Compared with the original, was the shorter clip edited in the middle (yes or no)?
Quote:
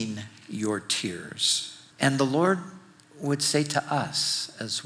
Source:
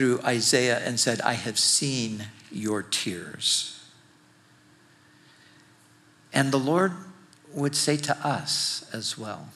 yes